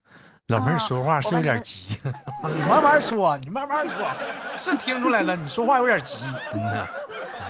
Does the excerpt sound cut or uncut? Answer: uncut